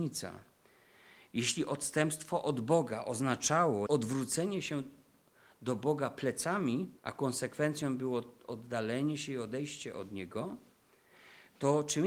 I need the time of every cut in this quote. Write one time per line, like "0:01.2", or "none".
0:03.9
0:07.0